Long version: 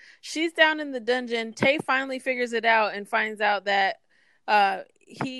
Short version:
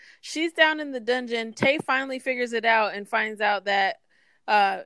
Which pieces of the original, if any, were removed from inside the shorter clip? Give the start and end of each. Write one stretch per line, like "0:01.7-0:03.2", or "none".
none